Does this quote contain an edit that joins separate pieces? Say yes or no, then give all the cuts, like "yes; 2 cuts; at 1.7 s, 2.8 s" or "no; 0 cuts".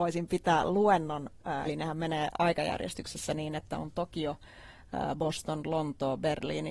yes; 1 cut; at 1.6 s